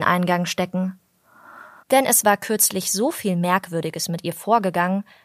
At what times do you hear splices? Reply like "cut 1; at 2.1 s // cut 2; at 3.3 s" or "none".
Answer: cut 1; at 1.8 s